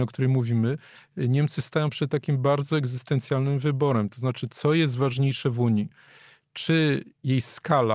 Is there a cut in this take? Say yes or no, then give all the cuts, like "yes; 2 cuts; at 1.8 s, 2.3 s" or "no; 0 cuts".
no; 0 cuts